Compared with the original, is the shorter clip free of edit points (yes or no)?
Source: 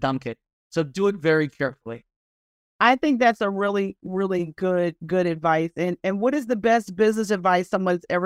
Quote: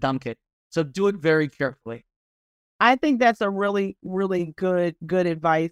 yes